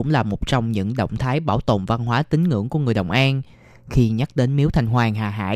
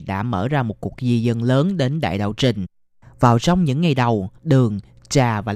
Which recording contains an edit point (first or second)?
second